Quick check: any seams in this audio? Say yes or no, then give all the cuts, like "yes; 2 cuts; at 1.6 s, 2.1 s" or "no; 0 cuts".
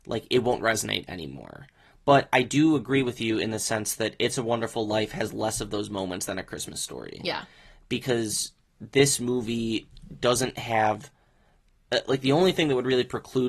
no; 0 cuts